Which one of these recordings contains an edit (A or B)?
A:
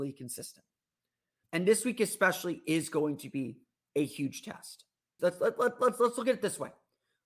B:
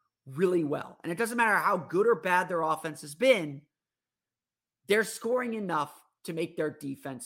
A